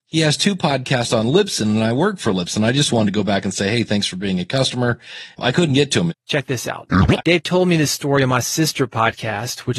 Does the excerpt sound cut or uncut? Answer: cut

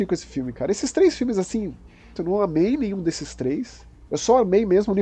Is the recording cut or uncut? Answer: cut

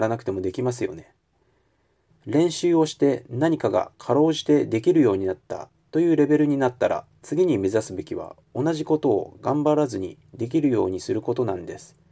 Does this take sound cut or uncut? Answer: cut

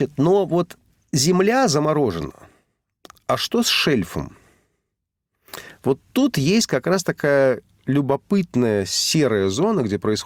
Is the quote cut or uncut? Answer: uncut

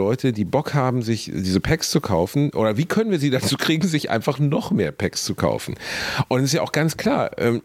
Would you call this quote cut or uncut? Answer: uncut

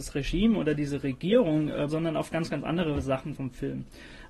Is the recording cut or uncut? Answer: cut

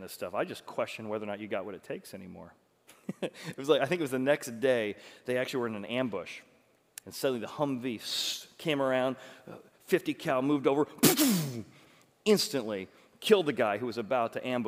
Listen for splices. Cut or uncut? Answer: cut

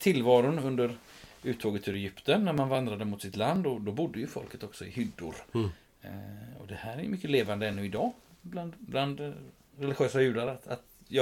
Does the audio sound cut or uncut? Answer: uncut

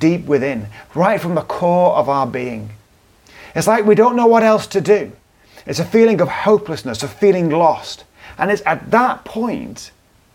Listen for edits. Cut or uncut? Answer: uncut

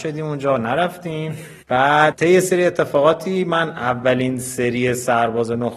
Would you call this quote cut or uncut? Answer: cut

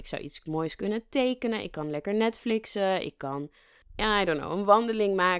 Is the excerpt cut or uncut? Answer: uncut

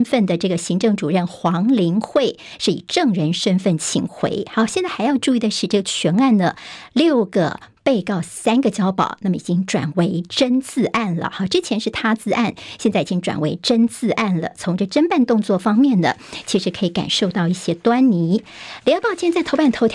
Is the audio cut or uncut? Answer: uncut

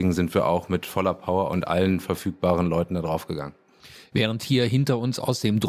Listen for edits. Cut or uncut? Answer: uncut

